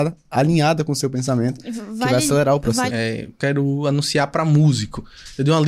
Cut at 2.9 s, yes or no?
yes